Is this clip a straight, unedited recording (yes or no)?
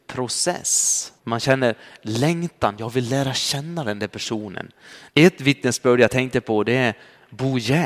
no